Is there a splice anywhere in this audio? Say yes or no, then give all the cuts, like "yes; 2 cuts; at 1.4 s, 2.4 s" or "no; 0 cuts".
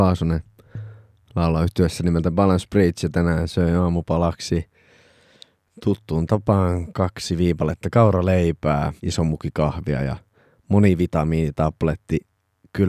yes; 1 cut; at 9.0 s